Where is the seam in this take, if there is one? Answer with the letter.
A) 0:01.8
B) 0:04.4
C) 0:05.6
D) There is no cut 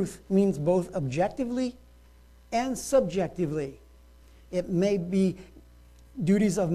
B